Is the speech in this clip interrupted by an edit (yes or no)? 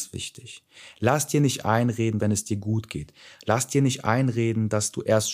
yes